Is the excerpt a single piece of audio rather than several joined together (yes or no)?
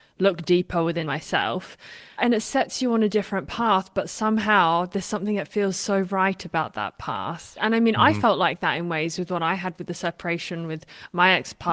no